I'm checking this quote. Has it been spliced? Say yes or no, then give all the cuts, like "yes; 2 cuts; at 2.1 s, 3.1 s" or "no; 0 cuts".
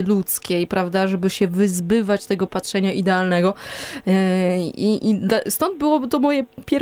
no; 0 cuts